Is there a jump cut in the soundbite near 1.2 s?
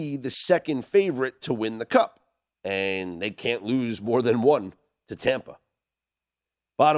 no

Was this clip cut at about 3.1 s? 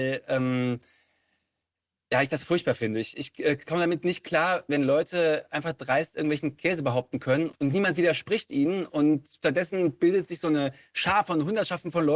no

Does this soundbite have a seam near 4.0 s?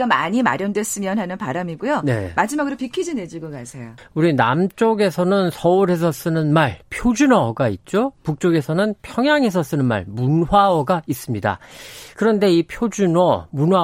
yes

